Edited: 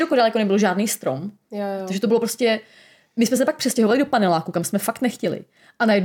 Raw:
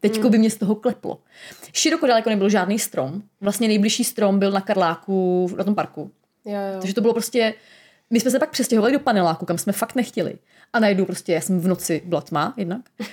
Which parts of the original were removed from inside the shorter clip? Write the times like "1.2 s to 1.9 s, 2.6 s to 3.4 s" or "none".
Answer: 3.3 s to 6.3 s